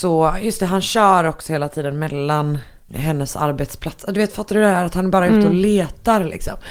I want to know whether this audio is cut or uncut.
cut